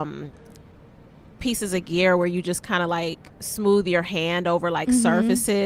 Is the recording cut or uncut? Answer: cut